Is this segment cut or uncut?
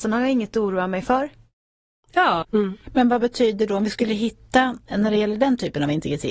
cut